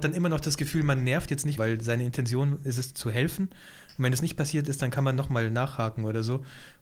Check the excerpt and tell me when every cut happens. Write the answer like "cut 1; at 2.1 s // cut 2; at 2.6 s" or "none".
cut 1; at 1.6 s

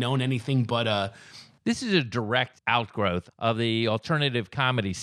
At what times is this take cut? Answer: cut 1; at 1.6 s

